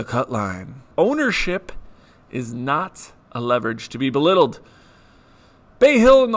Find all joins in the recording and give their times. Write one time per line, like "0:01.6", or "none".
0:00.9
0:03.2